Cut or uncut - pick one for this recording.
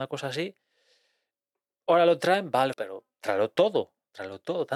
cut